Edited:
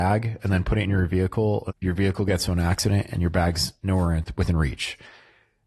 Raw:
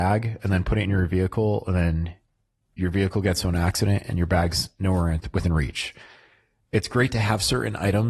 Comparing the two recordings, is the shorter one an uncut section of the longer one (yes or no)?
no